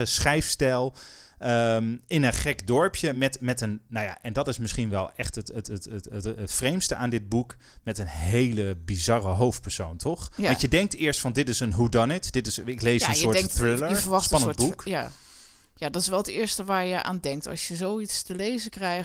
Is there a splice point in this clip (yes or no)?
no